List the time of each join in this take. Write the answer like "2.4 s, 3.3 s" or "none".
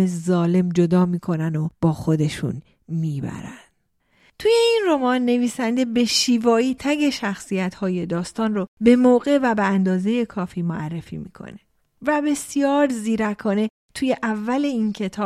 6.8 s